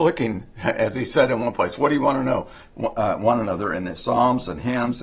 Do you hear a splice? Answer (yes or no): yes